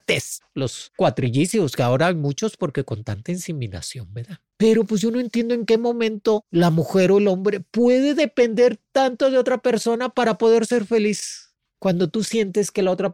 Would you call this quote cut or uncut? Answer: cut